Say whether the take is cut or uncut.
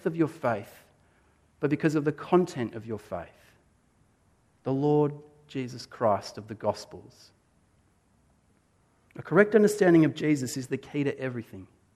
uncut